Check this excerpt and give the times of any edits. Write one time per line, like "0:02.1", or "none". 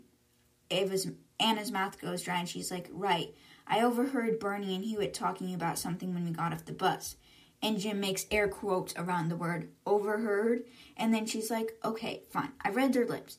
none